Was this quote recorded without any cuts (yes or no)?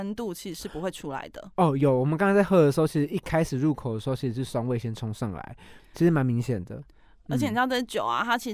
no